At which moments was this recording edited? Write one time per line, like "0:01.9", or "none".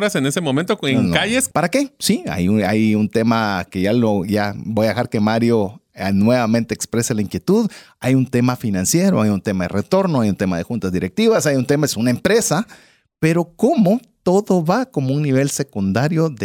0:01.5